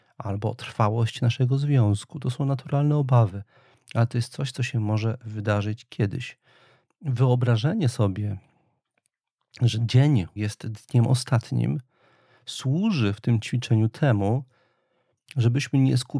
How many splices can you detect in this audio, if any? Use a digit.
2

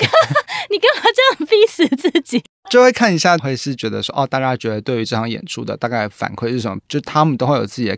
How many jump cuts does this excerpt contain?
2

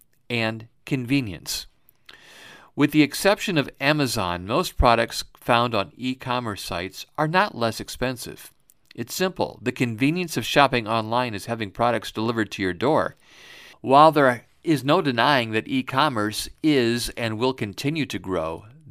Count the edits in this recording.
1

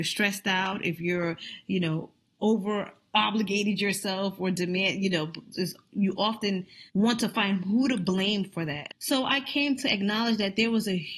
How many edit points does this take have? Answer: 3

